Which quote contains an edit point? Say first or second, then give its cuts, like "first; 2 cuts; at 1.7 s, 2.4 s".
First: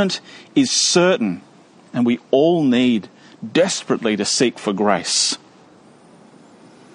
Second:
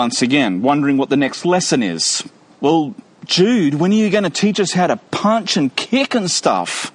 second; 1 cut; at 2.5 s